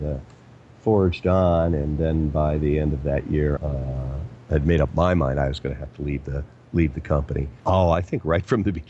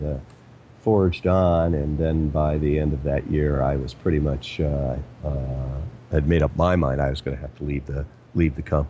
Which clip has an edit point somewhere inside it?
first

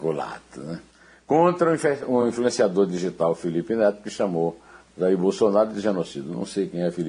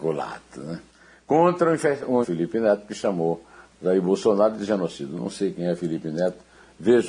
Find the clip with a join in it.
second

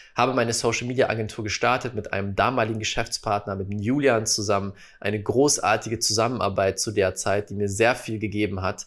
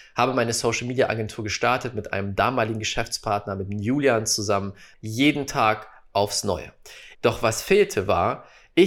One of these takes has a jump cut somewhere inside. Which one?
second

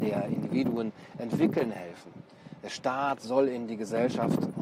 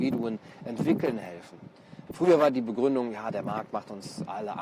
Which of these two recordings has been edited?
second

